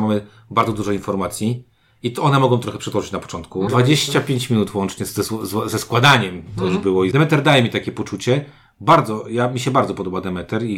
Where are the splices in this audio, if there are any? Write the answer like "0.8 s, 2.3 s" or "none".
3.7 s, 7.1 s